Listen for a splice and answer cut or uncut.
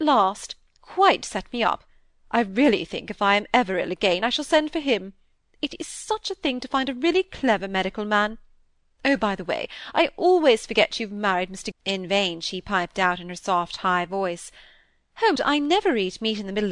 cut